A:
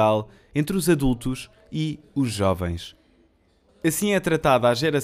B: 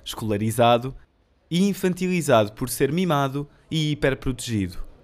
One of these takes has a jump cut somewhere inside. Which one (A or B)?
A